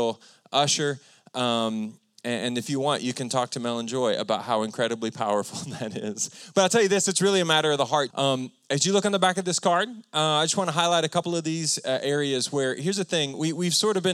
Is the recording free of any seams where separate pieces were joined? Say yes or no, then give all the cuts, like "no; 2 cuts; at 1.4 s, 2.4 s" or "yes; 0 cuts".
no; 1 cut; at 8.1 s